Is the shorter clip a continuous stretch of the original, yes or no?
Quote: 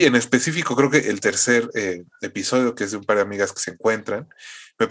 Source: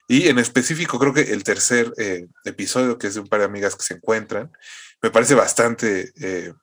yes